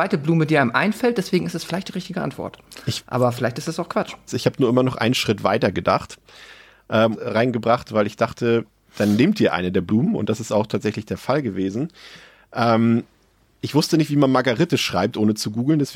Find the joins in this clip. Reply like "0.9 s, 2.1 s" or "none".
4.3 s, 7.1 s